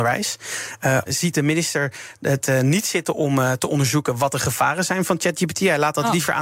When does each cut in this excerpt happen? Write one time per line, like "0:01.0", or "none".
0:01.1